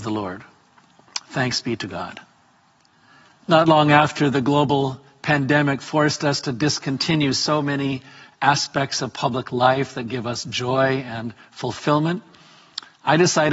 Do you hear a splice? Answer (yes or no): no